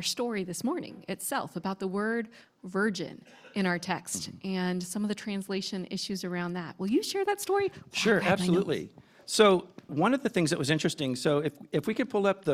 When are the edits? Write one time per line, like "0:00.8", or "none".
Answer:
0:09.9